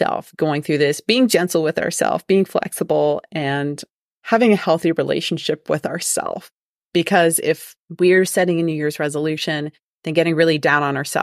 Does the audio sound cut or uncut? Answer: uncut